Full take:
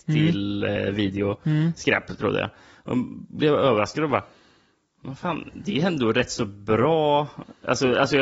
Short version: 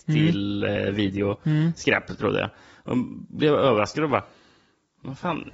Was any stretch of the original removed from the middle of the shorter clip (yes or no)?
no